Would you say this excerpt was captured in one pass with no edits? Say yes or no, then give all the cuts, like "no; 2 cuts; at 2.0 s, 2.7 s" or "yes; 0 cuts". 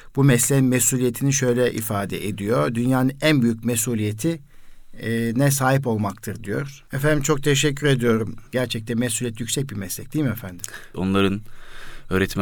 no; 3 cuts; at 6.9 s, 8.5 s, 10.9 s